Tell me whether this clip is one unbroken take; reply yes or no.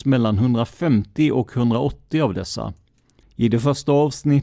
no